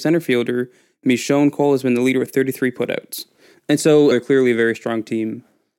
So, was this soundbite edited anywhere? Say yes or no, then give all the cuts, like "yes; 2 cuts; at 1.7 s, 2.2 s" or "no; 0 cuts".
yes; 1 cut; at 4.1 s